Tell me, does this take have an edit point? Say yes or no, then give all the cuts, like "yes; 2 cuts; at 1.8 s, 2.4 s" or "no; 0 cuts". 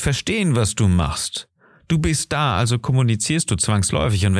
no; 0 cuts